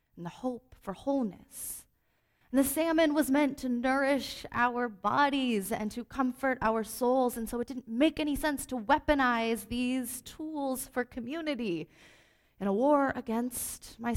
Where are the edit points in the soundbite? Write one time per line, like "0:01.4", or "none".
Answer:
none